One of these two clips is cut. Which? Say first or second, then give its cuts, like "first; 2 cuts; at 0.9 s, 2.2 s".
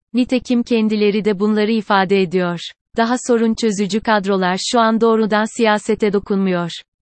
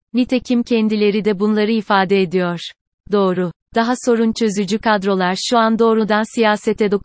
first; 1 cut; at 2.9 s